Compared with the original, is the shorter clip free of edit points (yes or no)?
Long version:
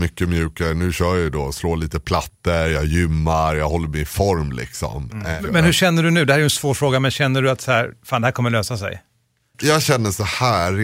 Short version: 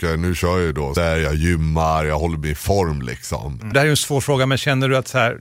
no